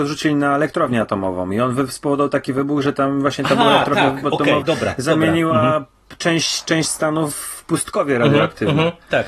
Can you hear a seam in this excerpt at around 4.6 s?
yes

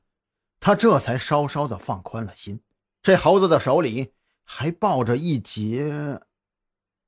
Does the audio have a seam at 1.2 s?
no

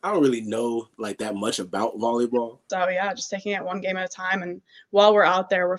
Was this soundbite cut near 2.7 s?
yes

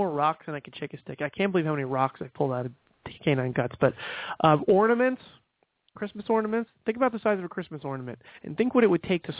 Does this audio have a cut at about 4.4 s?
no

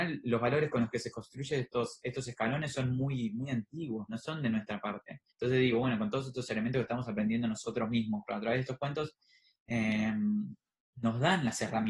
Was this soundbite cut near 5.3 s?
yes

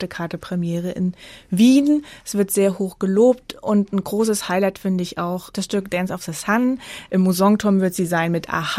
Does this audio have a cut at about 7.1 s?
yes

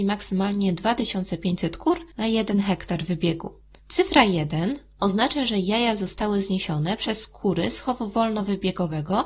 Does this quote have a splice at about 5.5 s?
no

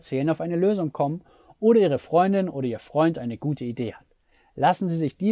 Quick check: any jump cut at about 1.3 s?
no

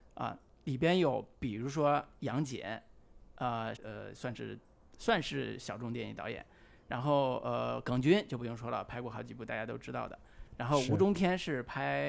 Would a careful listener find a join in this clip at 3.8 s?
yes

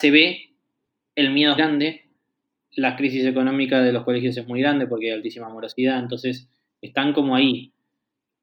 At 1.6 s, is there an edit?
yes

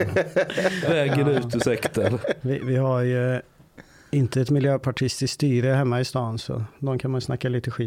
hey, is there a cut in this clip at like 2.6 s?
no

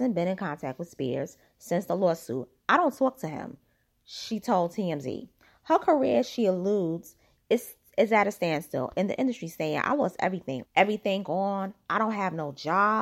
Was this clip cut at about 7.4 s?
no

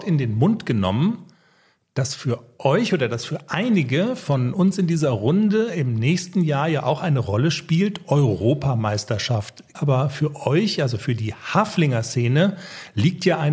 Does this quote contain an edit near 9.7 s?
yes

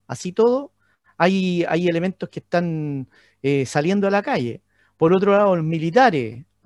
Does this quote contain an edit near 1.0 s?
no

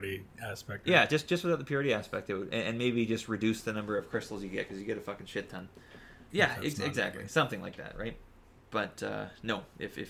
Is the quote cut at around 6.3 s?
yes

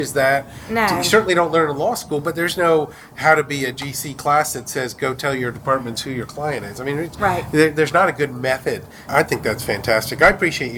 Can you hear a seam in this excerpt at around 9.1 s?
yes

